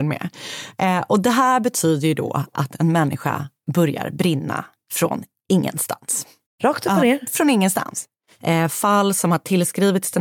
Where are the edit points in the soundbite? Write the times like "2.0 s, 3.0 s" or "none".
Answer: 6.5 s, 8.4 s